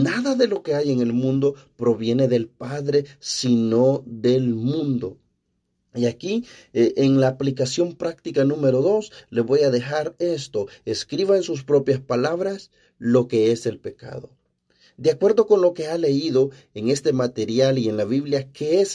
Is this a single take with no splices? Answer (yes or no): yes